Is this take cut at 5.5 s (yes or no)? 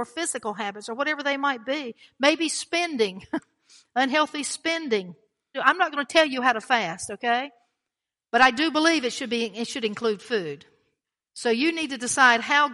yes